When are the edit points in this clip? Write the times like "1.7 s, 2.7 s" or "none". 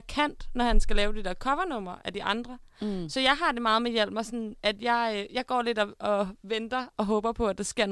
none